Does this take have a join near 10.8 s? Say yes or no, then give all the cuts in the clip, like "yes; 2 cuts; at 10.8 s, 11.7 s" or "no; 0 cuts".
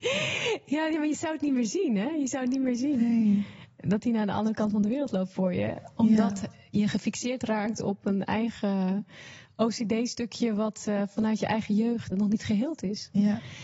no; 1 cut; at 12.1 s